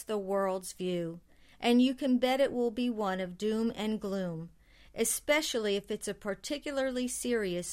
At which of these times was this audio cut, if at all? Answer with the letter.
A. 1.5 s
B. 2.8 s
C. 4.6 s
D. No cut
D